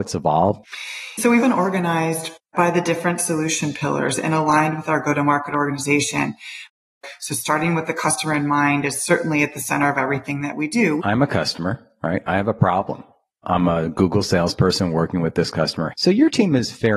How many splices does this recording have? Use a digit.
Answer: 3